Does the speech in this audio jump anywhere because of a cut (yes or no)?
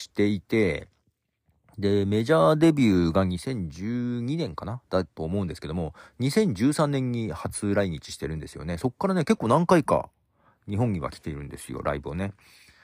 no